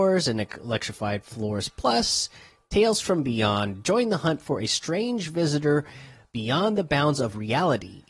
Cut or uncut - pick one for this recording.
uncut